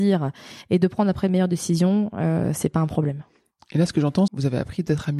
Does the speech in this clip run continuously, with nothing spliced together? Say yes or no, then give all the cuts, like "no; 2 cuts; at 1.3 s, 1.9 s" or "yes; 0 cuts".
no; 1 cut; at 4.3 s